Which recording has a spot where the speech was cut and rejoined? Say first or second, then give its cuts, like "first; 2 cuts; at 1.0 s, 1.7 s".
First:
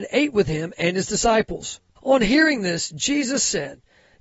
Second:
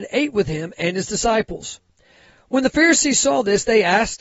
first; 1 cut; at 2.0 s